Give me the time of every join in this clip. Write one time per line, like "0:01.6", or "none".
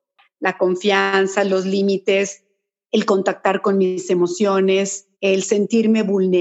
0:05.1